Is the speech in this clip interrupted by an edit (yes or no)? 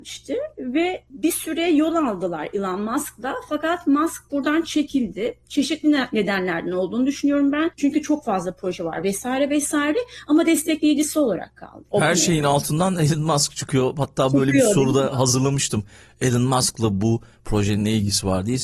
no